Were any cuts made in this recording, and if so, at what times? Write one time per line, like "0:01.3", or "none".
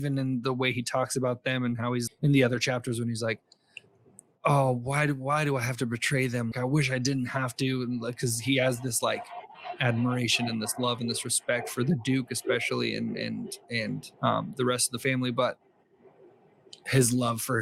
0:02.1
0:06.5
0:14.1